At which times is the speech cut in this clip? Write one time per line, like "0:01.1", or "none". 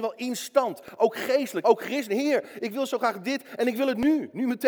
0:01.6